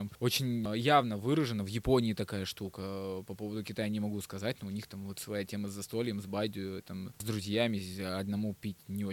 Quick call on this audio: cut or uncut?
uncut